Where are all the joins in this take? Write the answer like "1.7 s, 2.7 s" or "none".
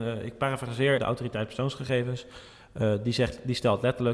1.0 s